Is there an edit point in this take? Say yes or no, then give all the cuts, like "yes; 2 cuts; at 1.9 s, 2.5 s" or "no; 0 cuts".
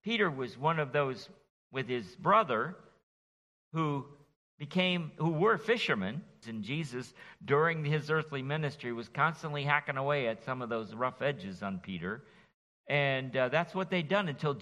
yes; 2 cuts; at 6.4 s, 12.7 s